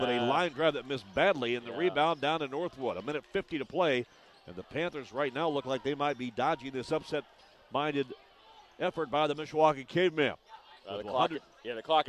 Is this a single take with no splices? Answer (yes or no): yes